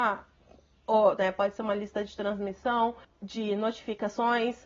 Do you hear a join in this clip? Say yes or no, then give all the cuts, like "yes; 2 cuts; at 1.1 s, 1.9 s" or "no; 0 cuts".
yes; 2 cuts; at 1.2 s, 3.0 s